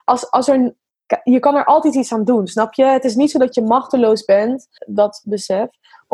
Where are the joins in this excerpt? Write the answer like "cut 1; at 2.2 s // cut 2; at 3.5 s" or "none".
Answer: cut 1; at 4.8 s

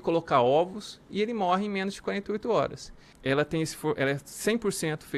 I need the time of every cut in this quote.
cut 1; at 3.1 s

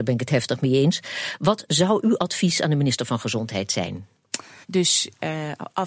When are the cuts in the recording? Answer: cut 1; at 4.6 s

